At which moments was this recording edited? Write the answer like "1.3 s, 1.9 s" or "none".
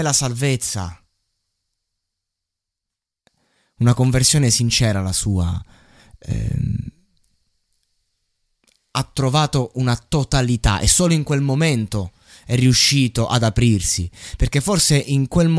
none